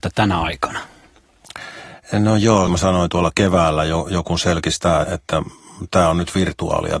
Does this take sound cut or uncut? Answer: cut